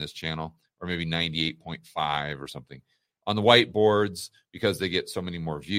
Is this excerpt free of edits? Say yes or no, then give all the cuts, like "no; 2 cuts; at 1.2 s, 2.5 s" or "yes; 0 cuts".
yes; 0 cuts